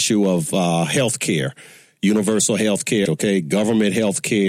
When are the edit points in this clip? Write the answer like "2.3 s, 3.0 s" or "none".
3.1 s